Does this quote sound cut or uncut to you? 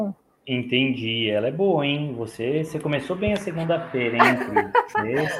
uncut